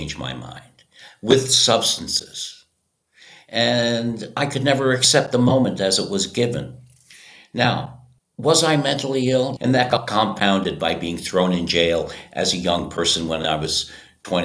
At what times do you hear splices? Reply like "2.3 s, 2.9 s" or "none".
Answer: 9.6 s